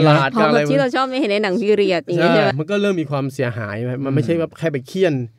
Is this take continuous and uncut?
no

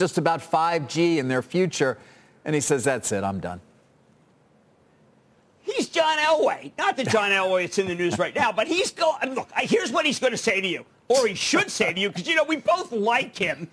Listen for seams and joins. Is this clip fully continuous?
yes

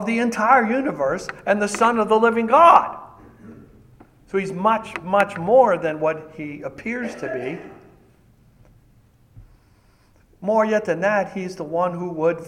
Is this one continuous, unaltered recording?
yes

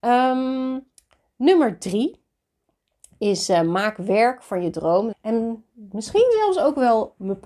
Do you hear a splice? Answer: yes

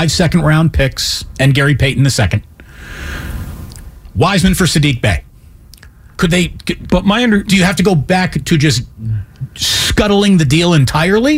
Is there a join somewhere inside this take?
no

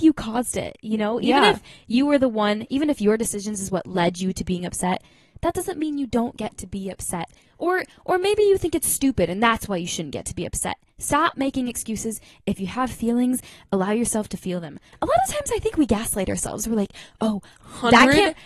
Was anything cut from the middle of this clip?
no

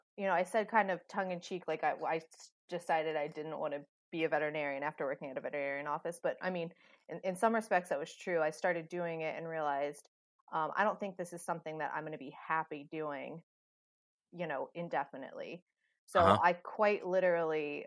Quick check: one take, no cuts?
yes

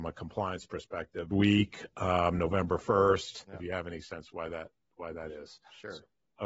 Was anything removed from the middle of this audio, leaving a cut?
yes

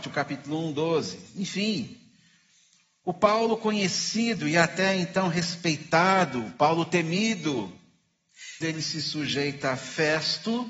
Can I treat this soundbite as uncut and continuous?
no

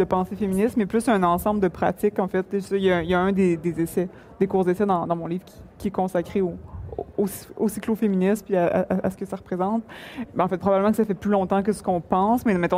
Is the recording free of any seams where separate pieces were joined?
no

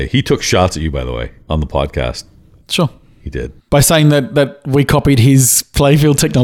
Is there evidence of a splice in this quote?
yes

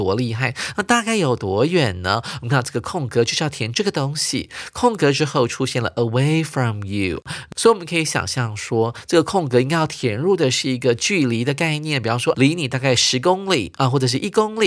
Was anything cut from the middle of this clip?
yes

